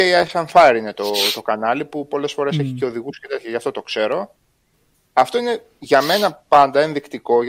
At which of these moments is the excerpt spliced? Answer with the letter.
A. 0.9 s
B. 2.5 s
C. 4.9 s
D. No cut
C